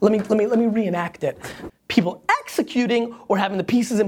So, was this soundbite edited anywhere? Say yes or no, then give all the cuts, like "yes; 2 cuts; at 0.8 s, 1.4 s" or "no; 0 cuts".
yes; 1 cut; at 1.7 s